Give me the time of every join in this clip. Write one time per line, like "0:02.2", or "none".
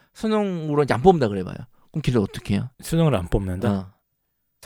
0:02.7